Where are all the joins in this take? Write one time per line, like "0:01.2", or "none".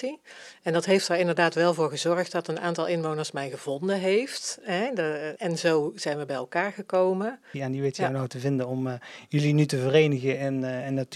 0:05.4
0:07.5